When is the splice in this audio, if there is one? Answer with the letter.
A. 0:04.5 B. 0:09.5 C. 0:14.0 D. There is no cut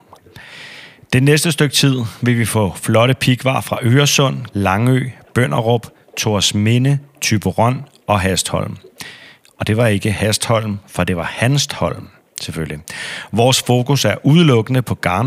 A